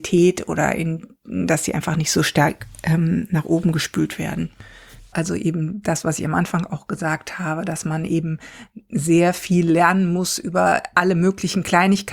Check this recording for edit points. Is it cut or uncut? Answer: cut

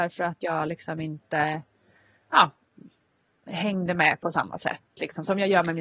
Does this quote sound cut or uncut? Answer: uncut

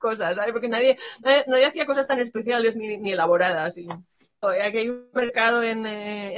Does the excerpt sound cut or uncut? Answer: cut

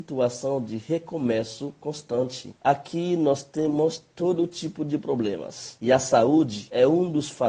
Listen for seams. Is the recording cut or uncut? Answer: uncut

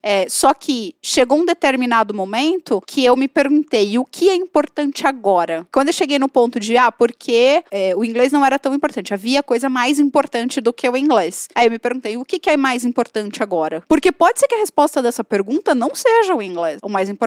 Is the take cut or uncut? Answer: uncut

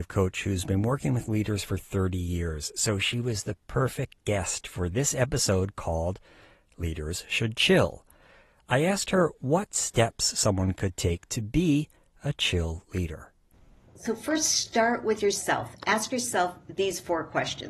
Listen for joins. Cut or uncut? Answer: uncut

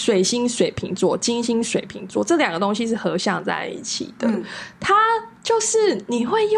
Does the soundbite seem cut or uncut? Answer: uncut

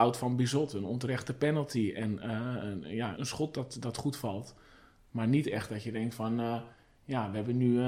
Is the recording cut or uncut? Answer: cut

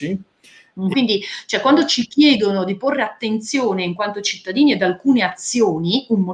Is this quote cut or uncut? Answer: cut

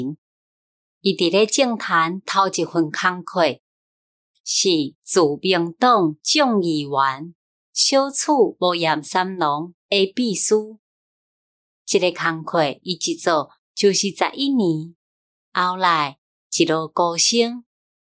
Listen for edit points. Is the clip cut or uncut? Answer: uncut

